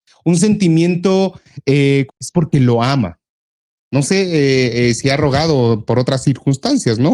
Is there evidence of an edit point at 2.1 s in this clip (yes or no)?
yes